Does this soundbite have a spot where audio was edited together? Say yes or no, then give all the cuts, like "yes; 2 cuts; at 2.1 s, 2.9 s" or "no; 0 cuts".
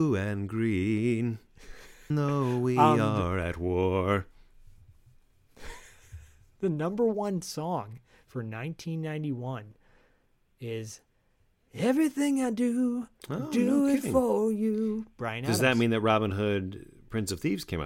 yes; 1 cut; at 2.1 s